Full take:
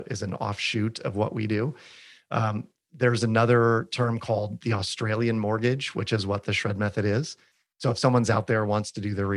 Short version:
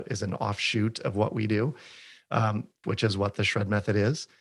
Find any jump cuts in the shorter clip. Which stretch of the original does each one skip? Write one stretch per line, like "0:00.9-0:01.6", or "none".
0:02.8-0:05.9